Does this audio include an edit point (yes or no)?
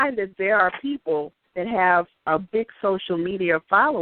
no